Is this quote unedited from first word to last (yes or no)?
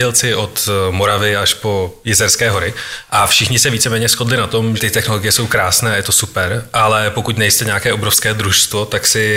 no